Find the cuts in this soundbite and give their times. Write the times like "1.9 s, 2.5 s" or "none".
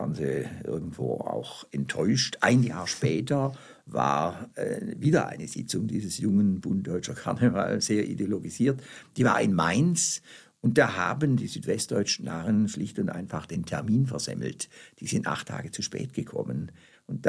none